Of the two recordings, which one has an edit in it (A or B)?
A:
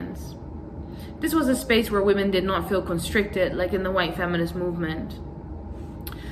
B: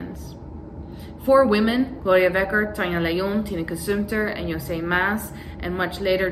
A